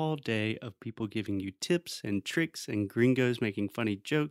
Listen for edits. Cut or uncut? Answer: uncut